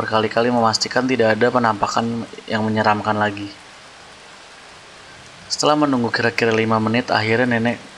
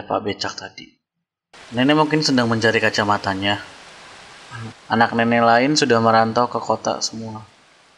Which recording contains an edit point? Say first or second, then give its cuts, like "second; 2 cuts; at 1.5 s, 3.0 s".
second; 2 cuts; at 1.5 s, 4.7 s